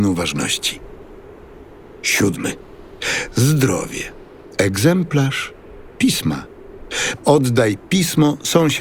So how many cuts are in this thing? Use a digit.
2